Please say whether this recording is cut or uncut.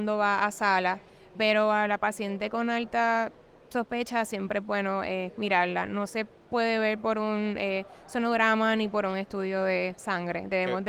uncut